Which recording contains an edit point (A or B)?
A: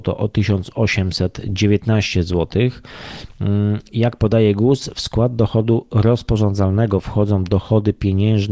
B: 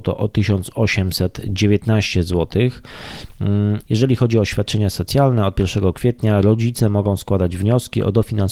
B